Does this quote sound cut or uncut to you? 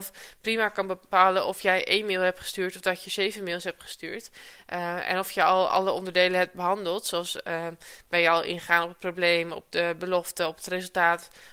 uncut